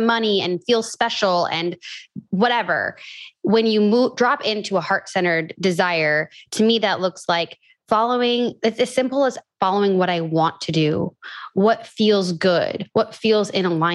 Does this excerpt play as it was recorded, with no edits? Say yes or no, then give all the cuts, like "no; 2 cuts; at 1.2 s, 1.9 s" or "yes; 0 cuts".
no; 1 cut; at 2.3 s